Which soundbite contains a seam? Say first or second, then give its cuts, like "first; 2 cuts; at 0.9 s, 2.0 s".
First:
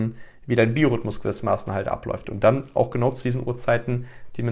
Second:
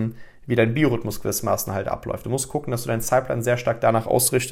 first; 1 cut; at 2.2 s